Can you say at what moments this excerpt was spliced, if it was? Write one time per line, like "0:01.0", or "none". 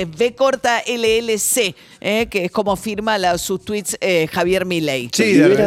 none